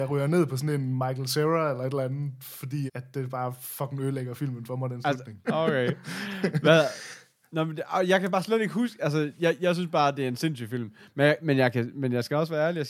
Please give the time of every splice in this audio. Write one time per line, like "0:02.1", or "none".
0:02.9
0:05.4